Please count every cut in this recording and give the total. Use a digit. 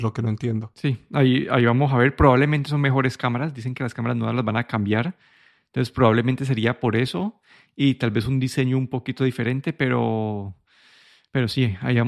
0